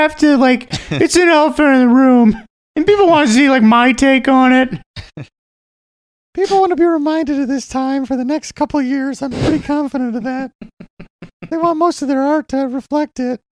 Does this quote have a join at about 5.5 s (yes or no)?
no